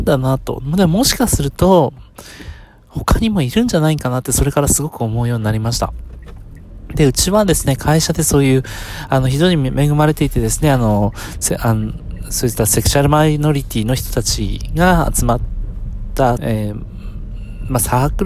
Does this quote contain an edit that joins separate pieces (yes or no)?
yes